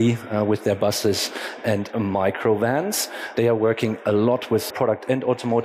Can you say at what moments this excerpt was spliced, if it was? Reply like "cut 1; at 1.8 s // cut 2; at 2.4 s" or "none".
cut 1; at 3.3 s // cut 2; at 4.7 s